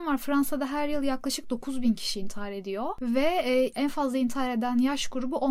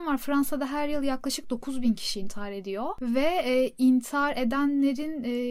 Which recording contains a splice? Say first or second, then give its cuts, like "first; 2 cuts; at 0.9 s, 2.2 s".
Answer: first; 1 cut; at 3.7 s